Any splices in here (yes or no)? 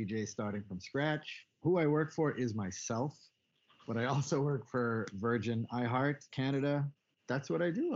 no